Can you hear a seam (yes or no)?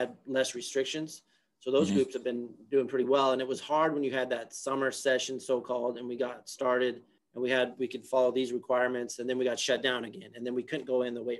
no